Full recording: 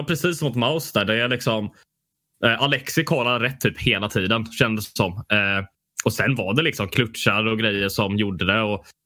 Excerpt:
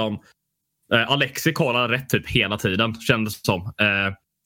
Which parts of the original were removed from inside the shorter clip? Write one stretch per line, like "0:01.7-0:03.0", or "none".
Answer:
none